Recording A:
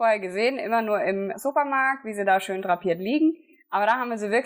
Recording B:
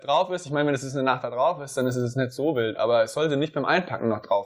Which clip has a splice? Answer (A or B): A